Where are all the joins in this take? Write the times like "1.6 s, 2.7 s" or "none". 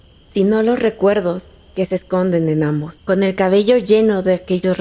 3.0 s